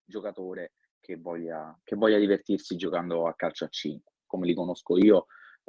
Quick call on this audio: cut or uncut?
cut